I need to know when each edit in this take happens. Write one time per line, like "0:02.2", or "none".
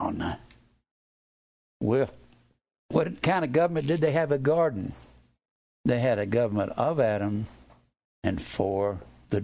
0:08.1